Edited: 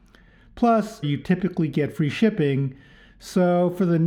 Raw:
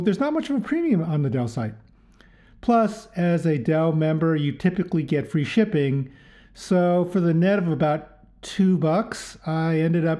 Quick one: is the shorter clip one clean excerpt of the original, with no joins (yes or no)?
no